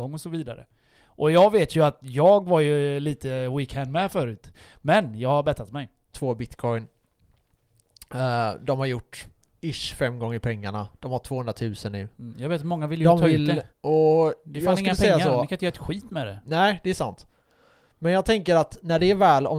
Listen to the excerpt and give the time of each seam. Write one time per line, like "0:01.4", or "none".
0:06.1
0:13.7